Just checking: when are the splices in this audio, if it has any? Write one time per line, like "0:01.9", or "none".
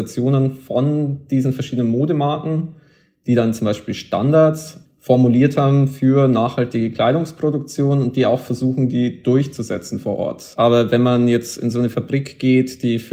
0:10.5